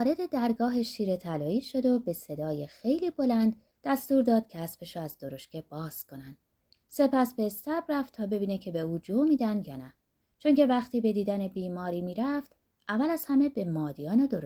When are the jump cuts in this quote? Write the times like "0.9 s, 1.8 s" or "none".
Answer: none